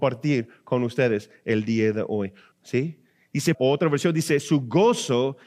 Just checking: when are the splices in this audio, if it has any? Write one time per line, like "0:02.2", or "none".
0:02.5
0:03.5